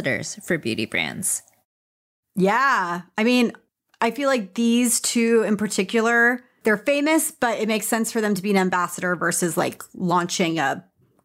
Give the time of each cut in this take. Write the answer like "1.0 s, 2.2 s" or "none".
none